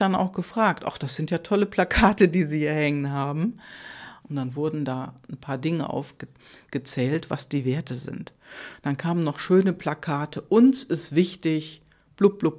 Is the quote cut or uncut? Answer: cut